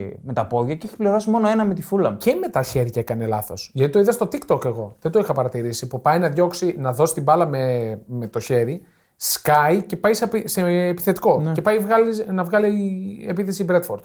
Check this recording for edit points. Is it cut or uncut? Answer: uncut